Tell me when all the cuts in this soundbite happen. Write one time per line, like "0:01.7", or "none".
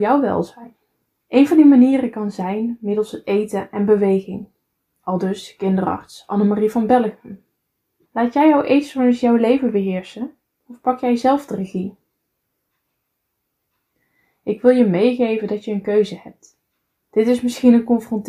0:01.2
0:08.0
0:17.0